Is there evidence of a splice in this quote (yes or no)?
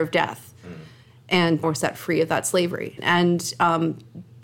yes